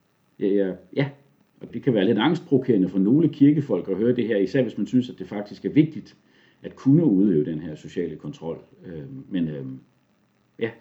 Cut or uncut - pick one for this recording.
cut